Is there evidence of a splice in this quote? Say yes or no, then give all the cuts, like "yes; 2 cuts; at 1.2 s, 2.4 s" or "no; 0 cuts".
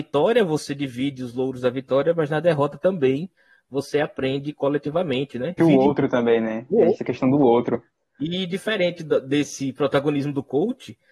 yes; 1 cut; at 5.6 s